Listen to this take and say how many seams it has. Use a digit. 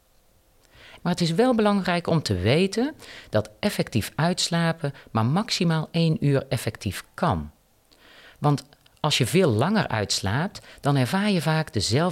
1